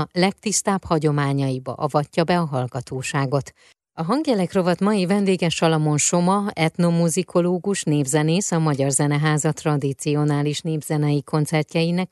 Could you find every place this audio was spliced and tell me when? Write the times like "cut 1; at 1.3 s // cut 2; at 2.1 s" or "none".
none